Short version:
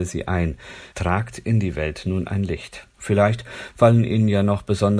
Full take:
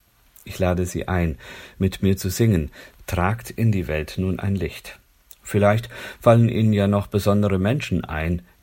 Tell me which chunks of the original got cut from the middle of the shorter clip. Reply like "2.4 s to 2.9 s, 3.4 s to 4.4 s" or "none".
1.7 s to 3.0 s, 5.1 s to 5.4 s